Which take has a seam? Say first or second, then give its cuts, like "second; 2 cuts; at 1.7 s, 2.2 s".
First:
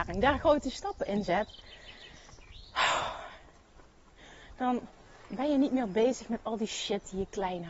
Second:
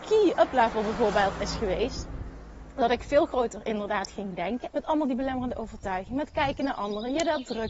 second; 1 cut; at 4.7 s